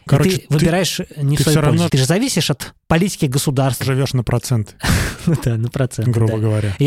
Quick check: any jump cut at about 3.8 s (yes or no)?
yes